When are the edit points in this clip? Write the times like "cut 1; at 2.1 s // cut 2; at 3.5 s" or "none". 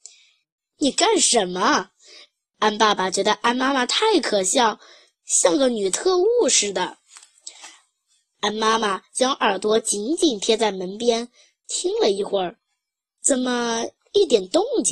none